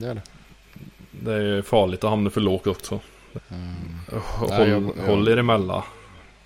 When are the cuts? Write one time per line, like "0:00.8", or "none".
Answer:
0:03.4

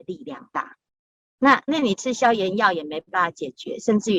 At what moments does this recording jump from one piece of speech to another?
0:01.7

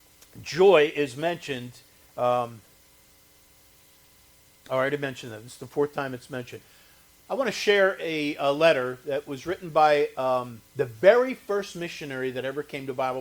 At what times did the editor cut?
none

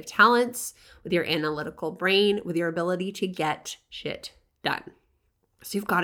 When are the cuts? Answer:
none

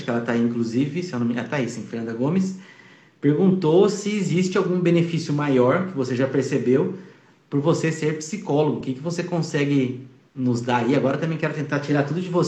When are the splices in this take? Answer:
none

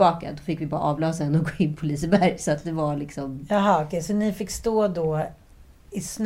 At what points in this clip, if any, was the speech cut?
none

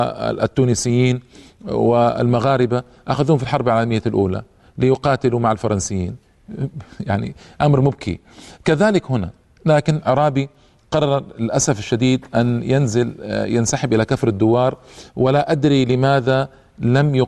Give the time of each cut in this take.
none

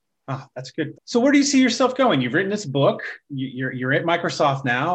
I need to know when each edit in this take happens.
0:00.9

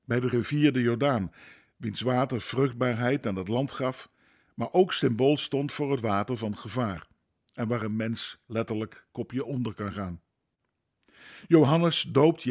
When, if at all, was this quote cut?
none

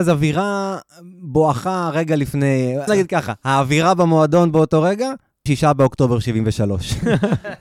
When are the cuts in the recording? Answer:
0:02.9
0:05.5

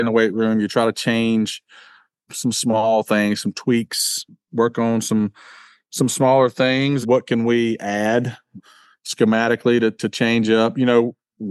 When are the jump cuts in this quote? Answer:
0:07.0

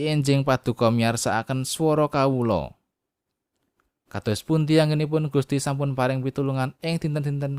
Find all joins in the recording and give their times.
0:03.9

